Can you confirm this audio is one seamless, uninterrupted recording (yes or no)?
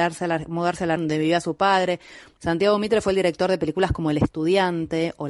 no